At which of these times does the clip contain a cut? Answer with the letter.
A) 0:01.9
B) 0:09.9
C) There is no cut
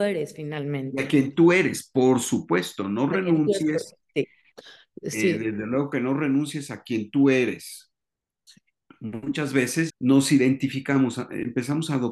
B